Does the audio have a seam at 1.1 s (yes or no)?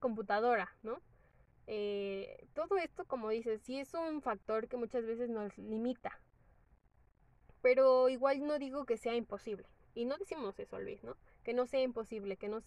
no